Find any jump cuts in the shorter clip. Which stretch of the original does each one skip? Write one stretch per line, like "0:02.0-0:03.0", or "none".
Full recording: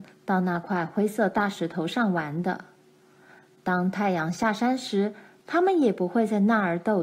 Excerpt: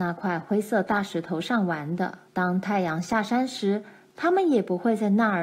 0:02.7-0:03.6